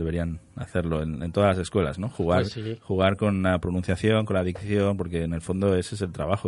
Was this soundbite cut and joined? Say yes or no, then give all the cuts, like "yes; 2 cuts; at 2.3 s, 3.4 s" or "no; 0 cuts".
no; 0 cuts